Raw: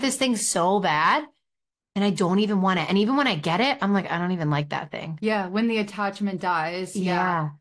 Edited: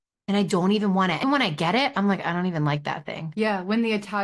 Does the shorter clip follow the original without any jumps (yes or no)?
no